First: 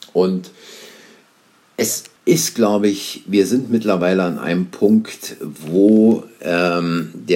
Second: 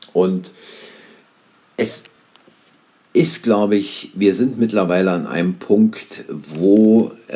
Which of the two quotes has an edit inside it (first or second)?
first